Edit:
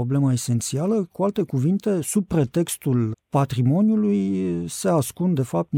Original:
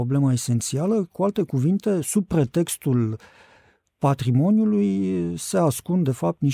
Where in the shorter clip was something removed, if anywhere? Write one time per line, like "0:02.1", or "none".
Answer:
0:03.1